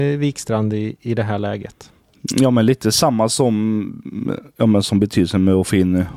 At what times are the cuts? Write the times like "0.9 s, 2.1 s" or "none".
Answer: none

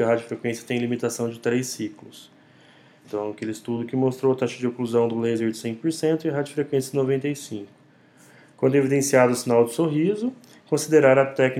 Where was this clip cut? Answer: 3.0 s

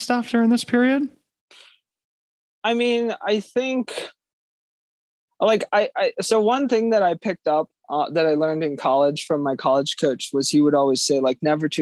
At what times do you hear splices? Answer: none

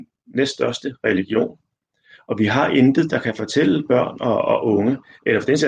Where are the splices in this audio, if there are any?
none

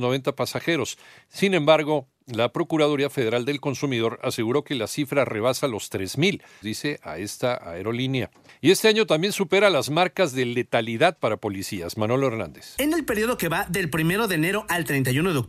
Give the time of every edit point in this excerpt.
6.6 s

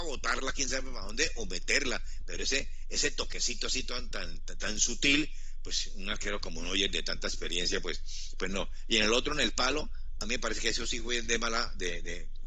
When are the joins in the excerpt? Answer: none

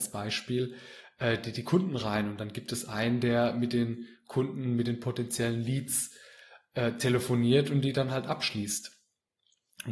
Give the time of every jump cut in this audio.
none

